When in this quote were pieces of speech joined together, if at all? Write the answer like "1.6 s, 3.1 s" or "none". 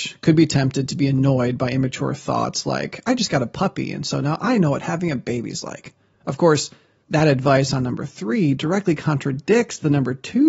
6.1 s